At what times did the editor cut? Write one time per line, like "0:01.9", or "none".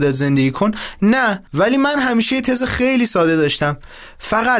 0:01.5